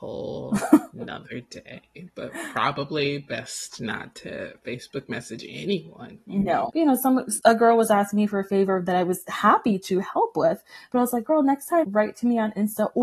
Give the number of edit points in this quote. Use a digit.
2